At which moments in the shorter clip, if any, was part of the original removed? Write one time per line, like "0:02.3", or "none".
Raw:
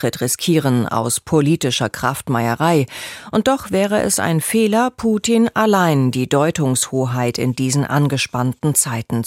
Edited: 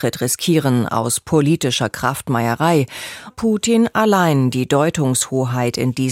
0:03.3